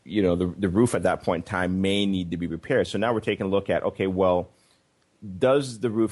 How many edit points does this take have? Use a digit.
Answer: 0